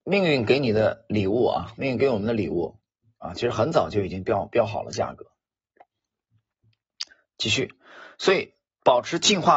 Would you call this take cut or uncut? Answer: uncut